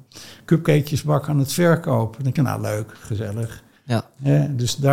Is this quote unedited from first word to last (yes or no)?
yes